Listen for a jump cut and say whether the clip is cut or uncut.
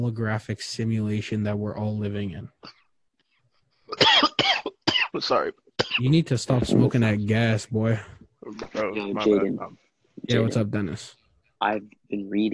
cut